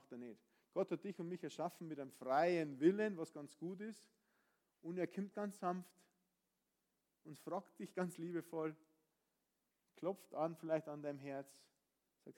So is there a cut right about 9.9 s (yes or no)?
no